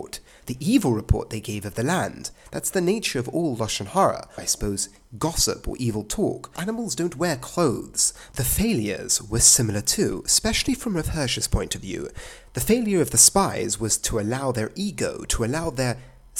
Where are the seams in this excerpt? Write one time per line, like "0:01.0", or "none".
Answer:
0:04.4
0:06.6
0:08.3